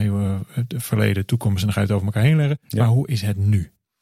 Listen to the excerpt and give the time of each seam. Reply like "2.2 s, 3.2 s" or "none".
none